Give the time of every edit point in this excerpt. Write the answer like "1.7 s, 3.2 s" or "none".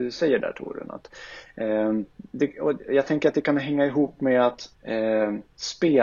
2.1 s, 4.7 s